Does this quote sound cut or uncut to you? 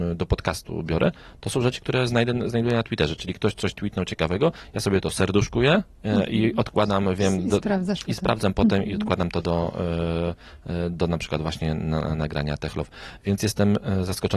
uncut